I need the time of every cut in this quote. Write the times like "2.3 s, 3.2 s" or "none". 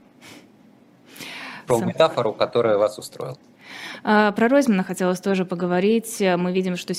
1.7 s

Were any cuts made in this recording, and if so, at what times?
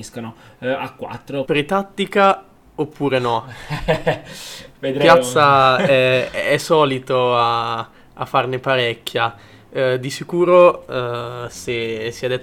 1.4 s

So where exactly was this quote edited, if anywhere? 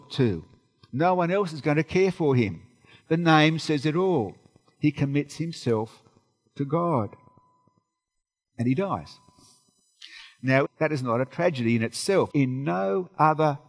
10.6 s, 12.3 s

